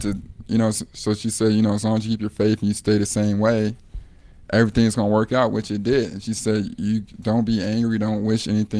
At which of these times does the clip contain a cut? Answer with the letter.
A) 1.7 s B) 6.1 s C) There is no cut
C